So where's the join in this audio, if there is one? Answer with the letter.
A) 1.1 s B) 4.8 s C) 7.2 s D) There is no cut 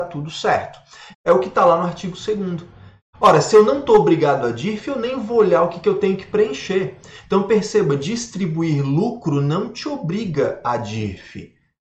A